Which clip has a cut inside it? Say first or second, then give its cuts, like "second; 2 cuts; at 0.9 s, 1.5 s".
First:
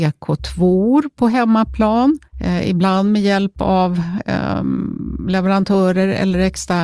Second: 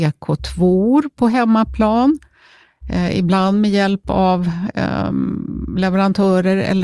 first; 1 cut; at 2.3 s